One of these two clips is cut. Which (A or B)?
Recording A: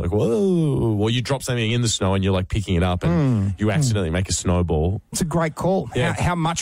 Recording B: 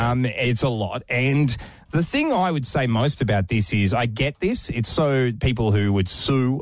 A